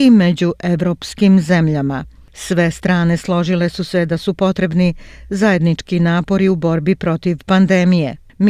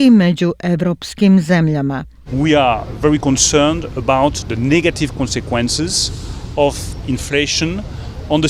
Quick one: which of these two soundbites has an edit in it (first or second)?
second